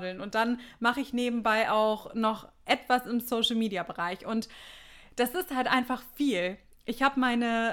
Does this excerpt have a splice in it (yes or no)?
no